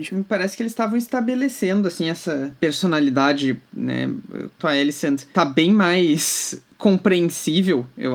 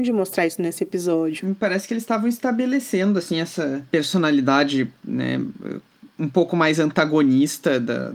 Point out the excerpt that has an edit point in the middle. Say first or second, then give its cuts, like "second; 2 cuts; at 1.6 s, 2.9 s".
first; 1 cut; at 4.6 s